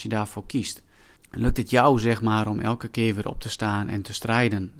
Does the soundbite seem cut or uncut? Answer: cut